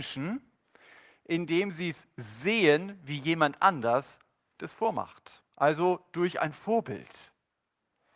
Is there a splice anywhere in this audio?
no; 0 cuts

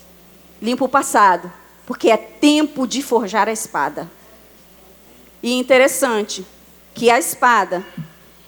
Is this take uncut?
no; 1 cut; at 5.3 s

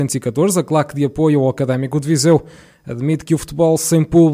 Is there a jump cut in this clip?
no; 0 cuts

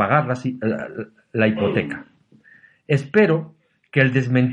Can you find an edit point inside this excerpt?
no; 0 cuts

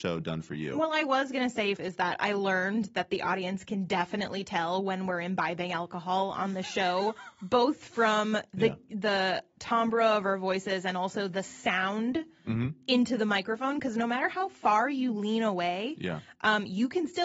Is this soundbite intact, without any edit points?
no; 1 cut; at 1.8 s

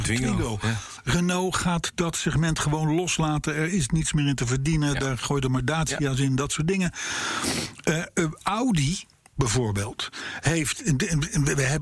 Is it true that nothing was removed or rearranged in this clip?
yes; 0 cuts

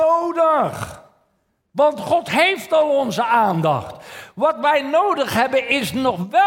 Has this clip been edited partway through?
no; 0 cuts

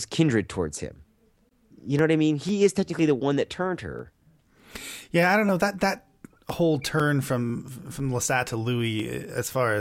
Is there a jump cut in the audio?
no; 0 cuts

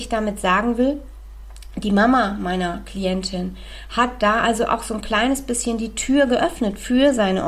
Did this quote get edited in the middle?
no; 0 cuts

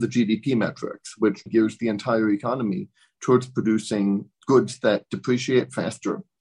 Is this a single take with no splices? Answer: no; 2 cuts; at 1.5 s, 4.3 s

